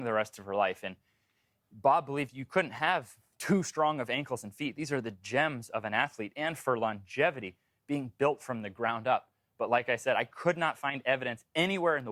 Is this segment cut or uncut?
uncut